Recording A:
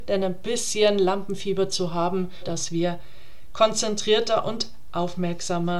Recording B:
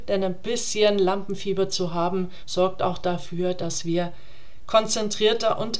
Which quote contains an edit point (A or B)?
A